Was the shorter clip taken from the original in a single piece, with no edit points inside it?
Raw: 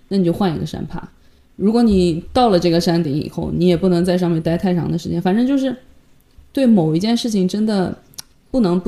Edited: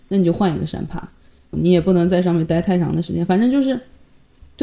no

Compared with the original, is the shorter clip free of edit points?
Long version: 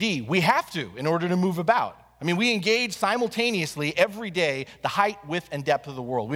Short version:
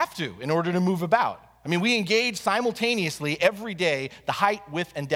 yes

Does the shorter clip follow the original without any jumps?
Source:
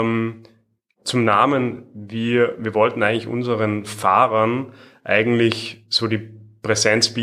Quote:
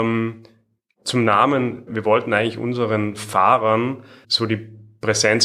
no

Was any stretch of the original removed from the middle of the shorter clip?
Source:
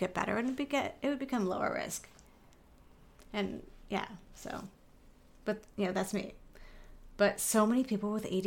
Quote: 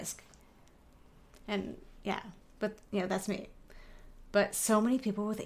yes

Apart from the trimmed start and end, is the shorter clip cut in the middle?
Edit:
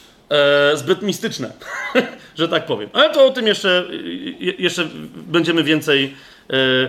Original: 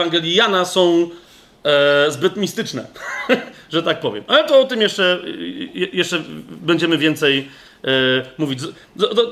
no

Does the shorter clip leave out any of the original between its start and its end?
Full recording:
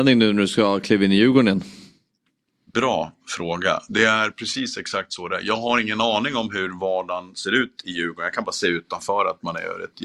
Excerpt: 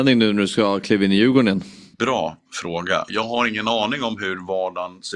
yes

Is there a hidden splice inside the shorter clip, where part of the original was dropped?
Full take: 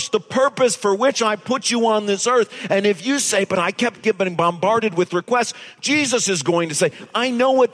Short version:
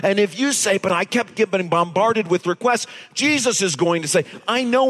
no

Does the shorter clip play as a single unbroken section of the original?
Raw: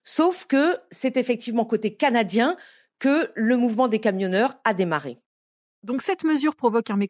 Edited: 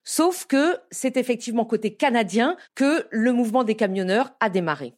no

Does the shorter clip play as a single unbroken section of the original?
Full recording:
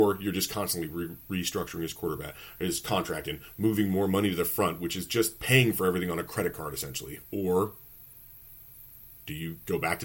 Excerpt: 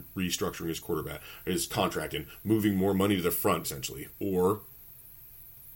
no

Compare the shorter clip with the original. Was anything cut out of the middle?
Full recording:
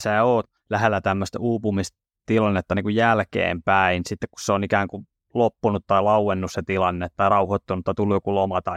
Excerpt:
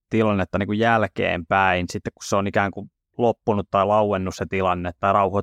no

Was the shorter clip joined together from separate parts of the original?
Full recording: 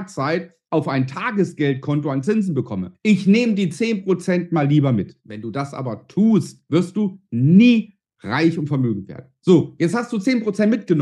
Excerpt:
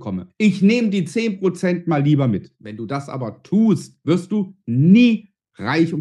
no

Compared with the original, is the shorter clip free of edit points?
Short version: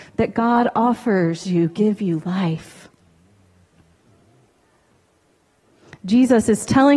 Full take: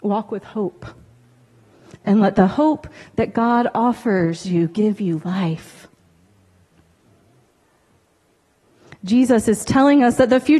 yes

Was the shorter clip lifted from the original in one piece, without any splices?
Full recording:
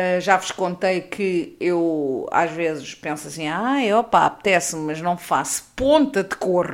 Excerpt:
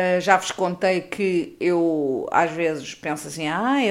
yes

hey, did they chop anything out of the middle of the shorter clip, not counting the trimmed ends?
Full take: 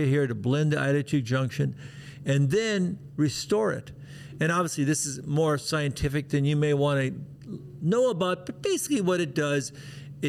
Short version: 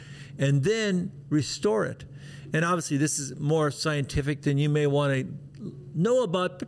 no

